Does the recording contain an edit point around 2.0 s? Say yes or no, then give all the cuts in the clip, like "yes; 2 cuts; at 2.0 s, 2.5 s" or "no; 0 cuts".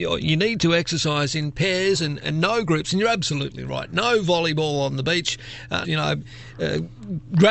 no; 1 cut; at 5.8 s